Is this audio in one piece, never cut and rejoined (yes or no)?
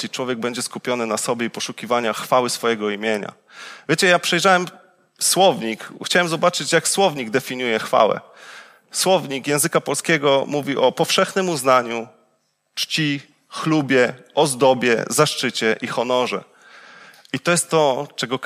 yes